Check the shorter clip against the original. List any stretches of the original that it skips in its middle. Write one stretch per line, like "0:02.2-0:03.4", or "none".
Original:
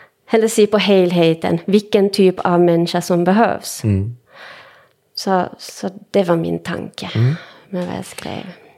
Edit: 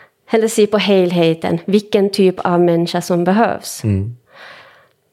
none